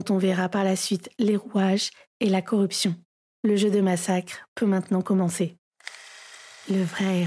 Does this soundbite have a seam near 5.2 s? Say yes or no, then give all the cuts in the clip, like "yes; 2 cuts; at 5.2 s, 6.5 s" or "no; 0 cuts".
no; 1 cut; at 3.3 s